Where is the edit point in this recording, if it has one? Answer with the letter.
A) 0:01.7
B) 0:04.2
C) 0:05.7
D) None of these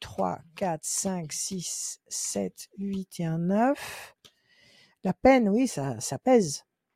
C